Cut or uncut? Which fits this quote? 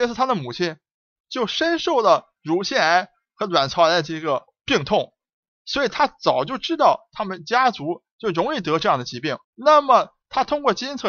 cut